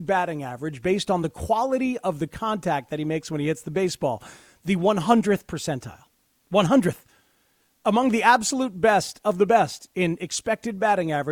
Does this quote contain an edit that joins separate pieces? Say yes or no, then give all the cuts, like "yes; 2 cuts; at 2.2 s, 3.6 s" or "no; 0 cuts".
no; 0 cuts